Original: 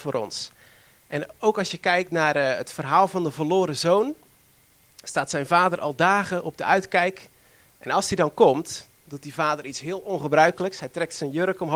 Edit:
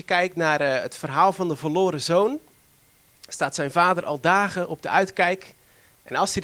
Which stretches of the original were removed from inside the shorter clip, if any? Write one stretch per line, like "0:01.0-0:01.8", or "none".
none